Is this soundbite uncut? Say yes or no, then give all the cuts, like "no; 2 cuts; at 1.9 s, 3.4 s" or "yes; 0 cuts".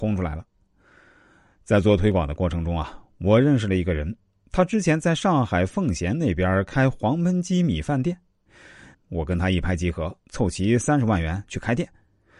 no; 2 cuts; at 8.9 s, 10.2 s